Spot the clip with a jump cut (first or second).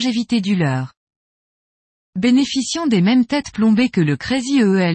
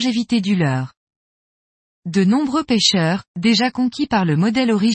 second